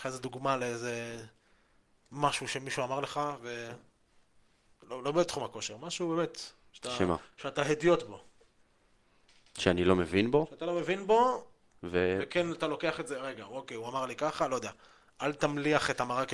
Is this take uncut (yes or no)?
yes